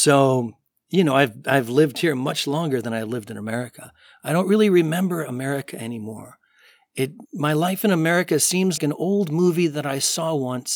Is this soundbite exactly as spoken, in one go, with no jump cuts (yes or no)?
no